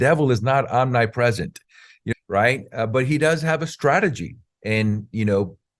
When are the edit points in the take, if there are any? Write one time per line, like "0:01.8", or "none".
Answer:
0:02.1